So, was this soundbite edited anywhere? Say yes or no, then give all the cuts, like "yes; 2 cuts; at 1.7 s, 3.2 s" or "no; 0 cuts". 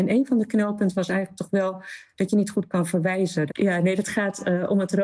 yes; 1 cut; at 3.5 s